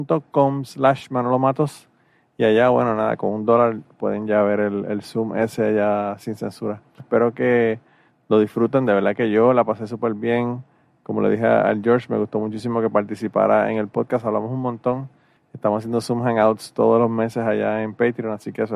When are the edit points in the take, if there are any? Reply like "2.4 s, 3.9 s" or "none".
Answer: 7.0 s